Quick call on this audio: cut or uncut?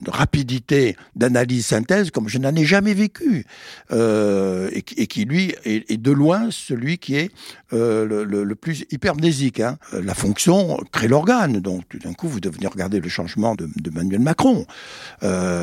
cut